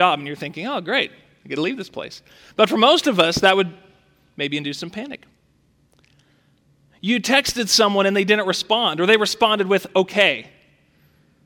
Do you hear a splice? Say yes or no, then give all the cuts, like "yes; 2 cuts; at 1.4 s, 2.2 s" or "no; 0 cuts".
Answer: no; 0 cuts